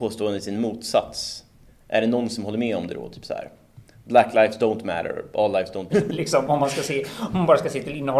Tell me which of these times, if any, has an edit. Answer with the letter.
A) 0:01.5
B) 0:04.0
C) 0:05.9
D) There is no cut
C